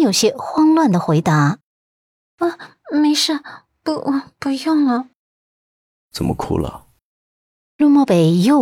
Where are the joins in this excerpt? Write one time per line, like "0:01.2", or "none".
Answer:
none